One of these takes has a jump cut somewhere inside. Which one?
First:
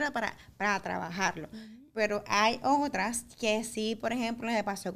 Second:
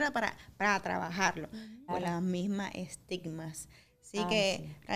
second; 1 cut; at 1.9 s

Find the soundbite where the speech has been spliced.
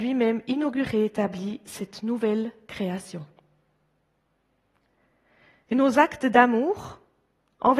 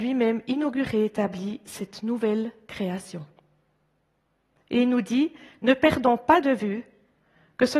second; 1 cut; at 4.6 s

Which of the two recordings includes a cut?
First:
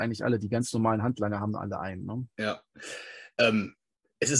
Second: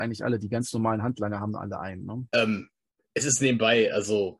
second; 1 cut; at 2.3 s

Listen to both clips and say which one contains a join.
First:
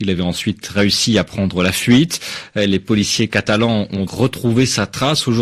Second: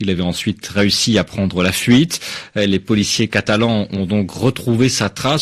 first; 1 cut; at 4.1 s

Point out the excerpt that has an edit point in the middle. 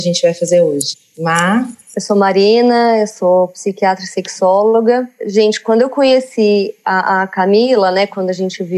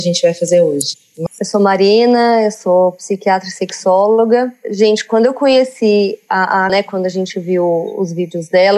second; 2 cuts; at 1.3 s, 6.7 s

